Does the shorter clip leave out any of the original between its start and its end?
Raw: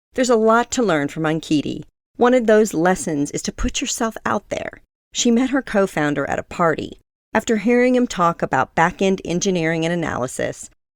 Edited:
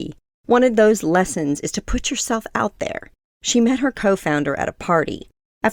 no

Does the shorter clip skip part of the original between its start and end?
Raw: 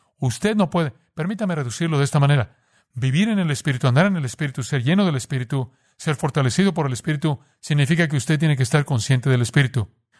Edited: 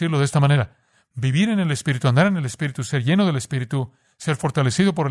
no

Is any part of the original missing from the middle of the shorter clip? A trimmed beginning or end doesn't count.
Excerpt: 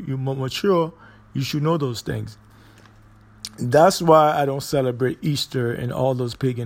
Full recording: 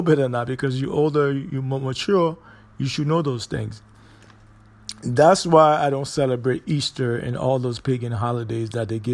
no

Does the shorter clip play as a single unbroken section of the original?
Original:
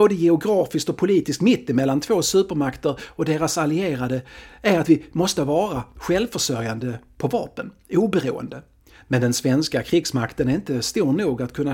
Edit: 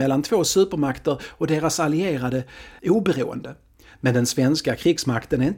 no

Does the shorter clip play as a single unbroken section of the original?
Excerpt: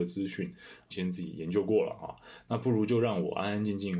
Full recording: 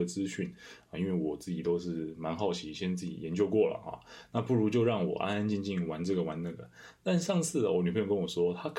no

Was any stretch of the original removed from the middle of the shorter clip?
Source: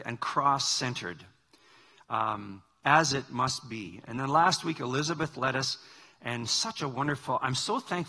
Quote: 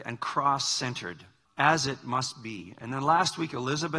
yes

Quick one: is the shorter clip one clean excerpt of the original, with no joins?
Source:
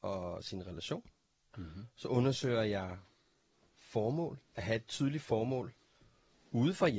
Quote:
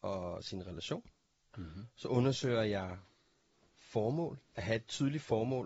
yes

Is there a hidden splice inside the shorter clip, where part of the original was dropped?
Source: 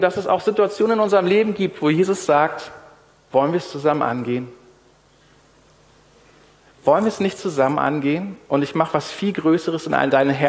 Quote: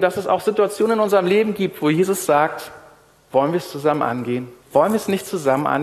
yes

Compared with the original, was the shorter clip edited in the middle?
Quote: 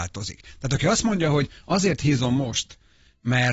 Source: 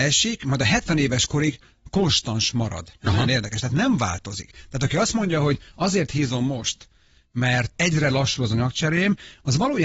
no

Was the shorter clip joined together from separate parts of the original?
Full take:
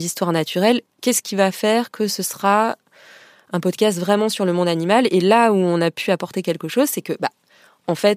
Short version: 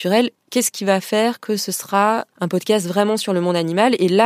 yes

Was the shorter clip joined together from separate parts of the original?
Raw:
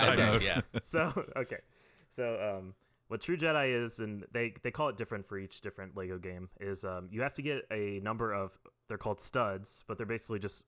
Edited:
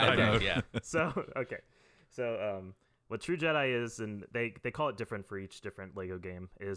no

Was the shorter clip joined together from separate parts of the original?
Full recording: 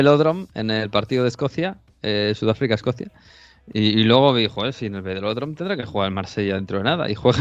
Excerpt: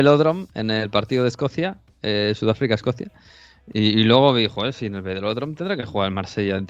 no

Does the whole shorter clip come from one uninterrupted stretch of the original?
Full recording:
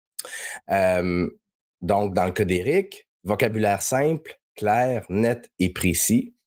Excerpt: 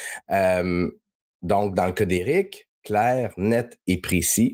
no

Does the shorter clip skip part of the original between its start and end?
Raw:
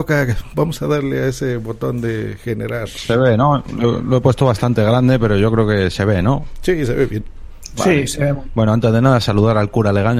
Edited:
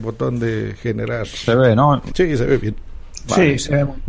yes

